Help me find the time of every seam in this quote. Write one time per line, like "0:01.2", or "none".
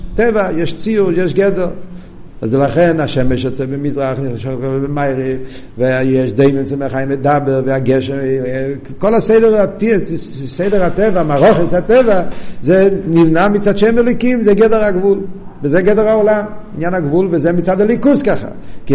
none